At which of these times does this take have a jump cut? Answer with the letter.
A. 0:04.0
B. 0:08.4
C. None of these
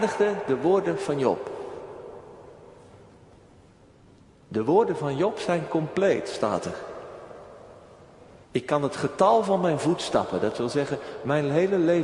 B